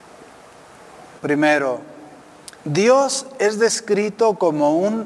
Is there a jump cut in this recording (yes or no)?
yes